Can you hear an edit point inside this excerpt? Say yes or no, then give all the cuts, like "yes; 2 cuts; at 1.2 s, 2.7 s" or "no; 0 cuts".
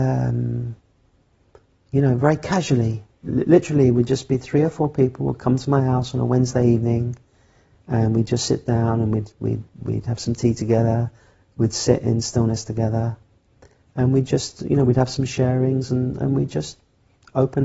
no; 0 cuts